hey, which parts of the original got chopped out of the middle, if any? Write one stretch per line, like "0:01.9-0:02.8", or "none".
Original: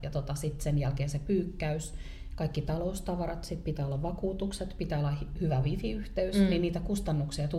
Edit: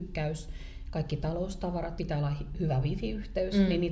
0:03.4-0:04.8

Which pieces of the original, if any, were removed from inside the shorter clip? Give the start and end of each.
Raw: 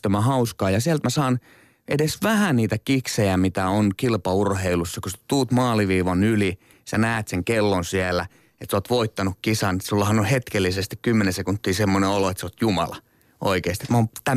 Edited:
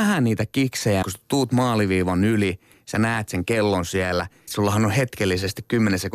0:03.3-0:05.0
0:08.5-0:09.8

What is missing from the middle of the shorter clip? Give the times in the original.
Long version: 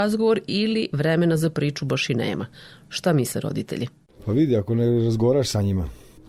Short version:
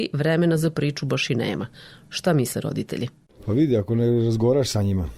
none

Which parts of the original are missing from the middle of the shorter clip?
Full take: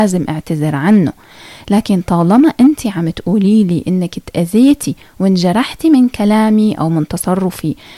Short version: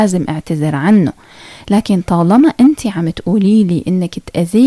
none

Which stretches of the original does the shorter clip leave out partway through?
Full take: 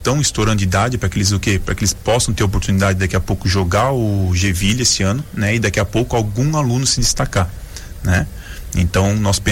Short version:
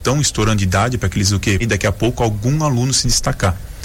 0:01.6-0:05.5

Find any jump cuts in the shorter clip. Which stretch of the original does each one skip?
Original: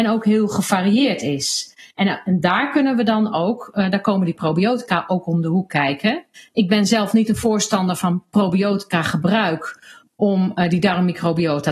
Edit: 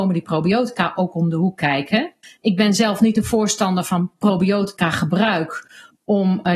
none

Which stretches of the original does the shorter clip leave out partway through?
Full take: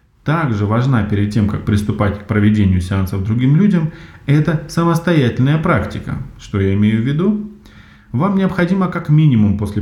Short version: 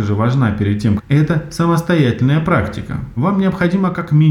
0:01.5-0:04.1
0:06.3-0:08.1

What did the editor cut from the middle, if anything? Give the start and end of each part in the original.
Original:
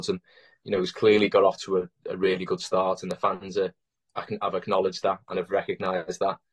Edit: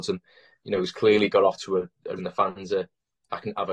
0:02.2-0:03.0

